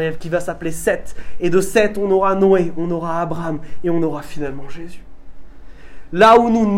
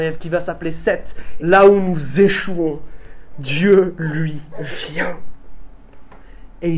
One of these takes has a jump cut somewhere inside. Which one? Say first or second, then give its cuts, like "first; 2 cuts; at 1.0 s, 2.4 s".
second; 1 cut; at 1.4 s